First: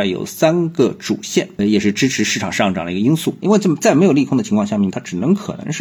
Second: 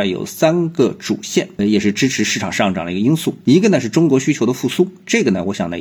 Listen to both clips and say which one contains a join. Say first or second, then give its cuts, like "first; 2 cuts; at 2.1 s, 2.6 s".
first; 2 cuts; at 3.4 s, 4.9 s